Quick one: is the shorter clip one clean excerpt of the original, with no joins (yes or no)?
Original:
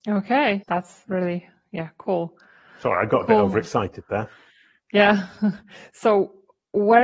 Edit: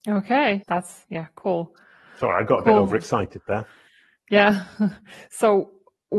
no